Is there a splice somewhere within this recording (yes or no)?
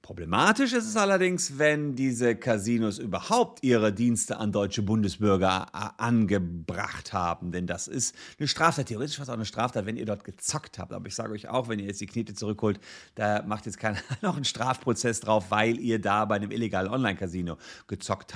no